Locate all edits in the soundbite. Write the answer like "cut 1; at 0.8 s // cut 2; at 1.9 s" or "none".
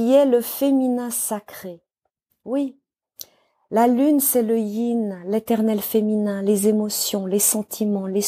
none